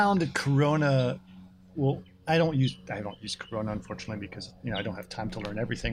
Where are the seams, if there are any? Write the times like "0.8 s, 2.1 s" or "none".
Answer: 1.7 s